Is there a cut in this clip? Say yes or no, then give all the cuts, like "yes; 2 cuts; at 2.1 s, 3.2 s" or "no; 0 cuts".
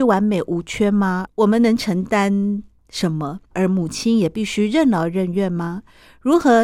yes; 2 cuts; at 1.3 s, 3.5 s